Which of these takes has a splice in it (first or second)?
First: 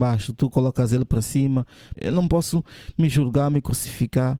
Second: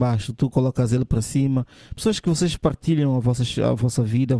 first